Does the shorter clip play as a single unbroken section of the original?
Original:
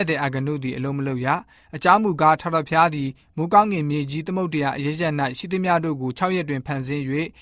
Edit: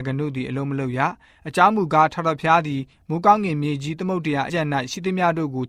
no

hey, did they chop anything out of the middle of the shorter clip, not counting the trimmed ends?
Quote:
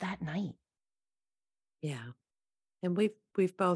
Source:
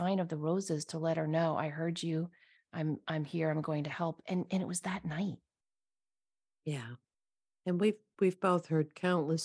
no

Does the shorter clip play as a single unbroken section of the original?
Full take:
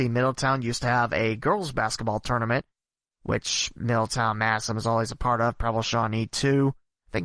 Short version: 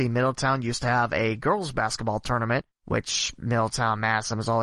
no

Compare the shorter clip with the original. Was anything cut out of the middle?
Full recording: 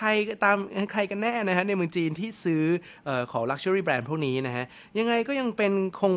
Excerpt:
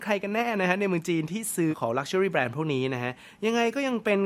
yes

